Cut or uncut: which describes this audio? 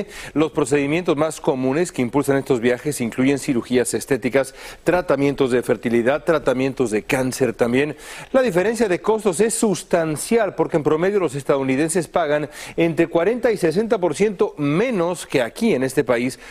uncut